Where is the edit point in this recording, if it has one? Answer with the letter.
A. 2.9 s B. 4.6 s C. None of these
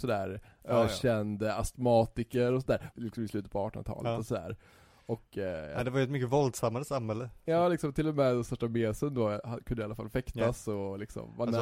A